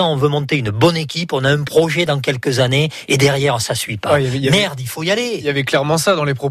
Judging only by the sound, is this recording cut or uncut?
uncut